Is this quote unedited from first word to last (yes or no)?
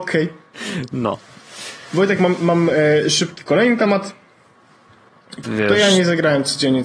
no